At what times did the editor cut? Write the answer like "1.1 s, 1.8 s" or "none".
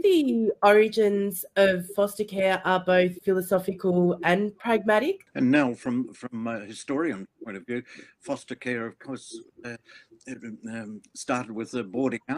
5.3 s

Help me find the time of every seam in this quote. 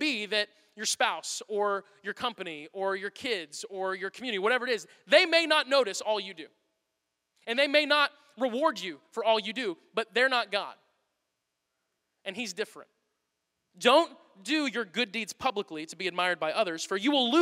13.7 s

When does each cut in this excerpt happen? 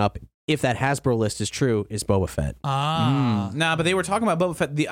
none

